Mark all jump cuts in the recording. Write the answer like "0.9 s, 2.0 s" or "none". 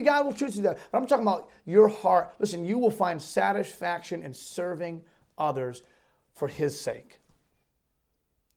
none